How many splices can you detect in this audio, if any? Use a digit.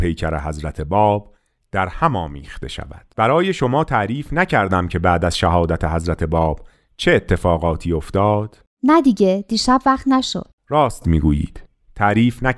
1